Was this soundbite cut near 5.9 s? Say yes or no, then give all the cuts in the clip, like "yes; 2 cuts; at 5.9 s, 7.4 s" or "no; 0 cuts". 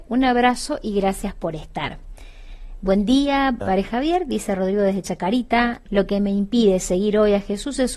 yes; 2 cuts; at 3.6 s, 5.9 s